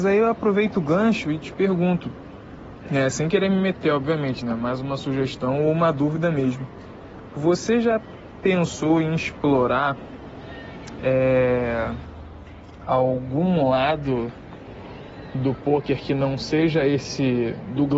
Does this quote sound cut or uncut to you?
uncut